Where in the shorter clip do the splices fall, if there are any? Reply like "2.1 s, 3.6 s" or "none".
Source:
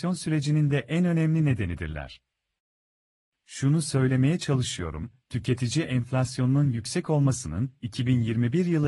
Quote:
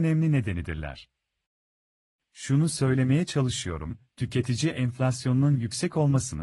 none